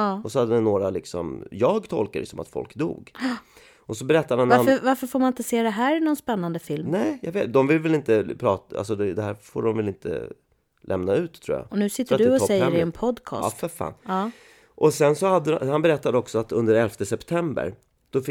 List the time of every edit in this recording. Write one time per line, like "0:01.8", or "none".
none